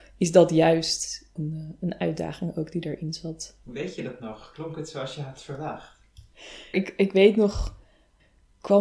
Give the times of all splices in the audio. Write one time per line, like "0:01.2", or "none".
0:01.4
0:03.6
0:06.7

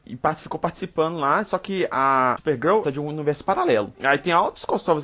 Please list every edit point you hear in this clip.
0:02.8
0:03.9

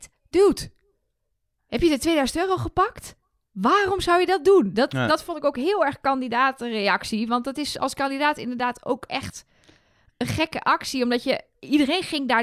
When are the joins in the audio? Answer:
none

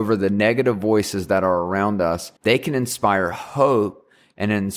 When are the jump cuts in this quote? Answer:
0:02.4

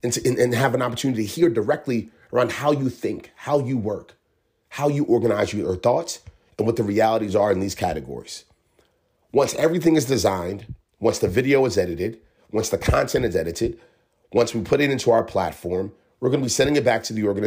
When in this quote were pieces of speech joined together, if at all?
none

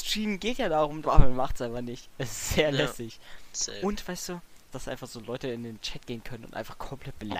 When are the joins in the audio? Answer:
0:01.0
0:04.7

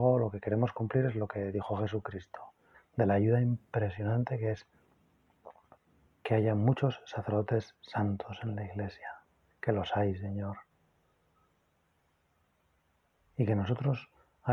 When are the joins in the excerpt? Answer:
0:02.7

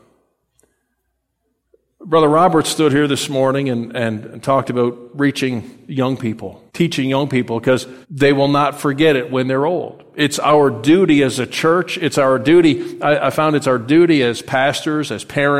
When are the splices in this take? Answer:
0:06.7
0:08.0

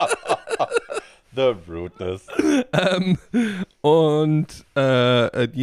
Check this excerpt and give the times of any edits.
none

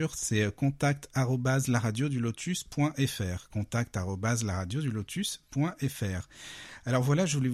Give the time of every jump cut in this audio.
none

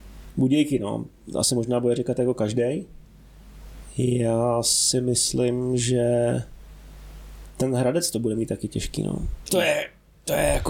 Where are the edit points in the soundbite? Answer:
0:09.5

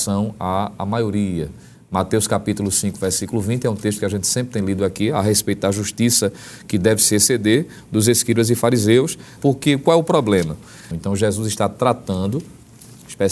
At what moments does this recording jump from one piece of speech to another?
0:09.4
0:10.9

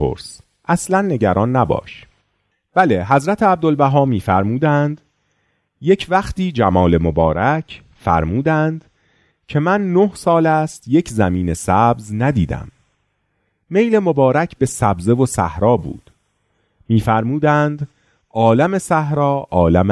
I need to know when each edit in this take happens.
none

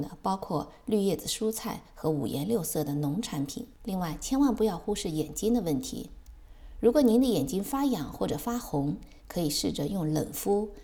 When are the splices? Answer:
0:03.7

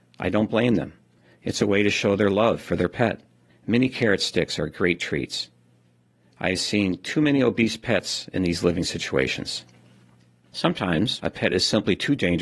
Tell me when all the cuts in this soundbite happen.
0:03.5

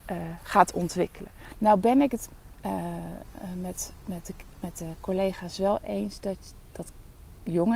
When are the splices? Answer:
0:01.5

